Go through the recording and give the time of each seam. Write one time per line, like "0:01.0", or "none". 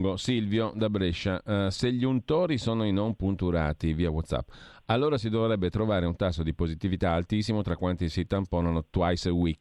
none